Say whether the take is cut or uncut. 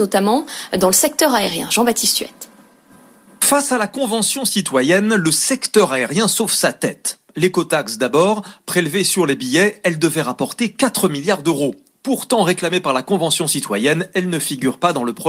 uncut